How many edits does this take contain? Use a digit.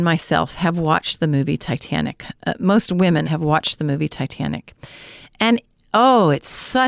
1